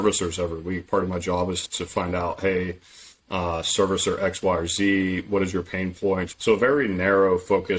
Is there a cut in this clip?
yes; 2 cuts; at 1.7 s, 6.3 s

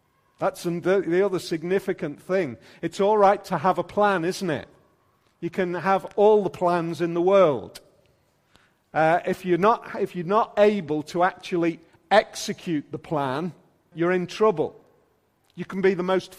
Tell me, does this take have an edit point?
yes; 1 cut; at 13.9 s

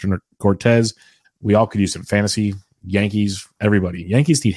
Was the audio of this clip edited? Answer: yes; 1 cut; at 1.2 s

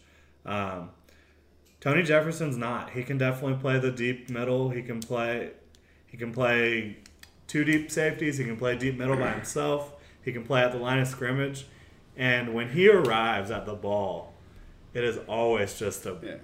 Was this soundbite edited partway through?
no; 0 cuts

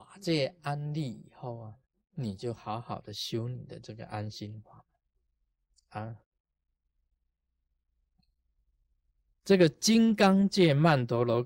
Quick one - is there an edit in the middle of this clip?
no; 0 cuts

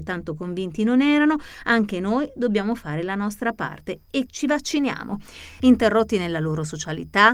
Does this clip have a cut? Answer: yes; 2 cuts; at 4.3 s, 5.6 s

